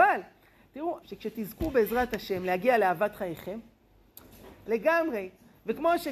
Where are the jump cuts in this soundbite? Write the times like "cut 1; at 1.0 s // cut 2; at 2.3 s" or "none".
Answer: cut 1; at 1.0 s // cut 2; at 4.7 s